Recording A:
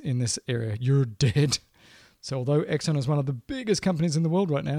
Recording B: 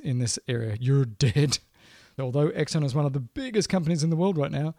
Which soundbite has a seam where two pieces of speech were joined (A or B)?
B